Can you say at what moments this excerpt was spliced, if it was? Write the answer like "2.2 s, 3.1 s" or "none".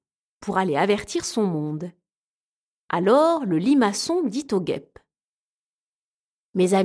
none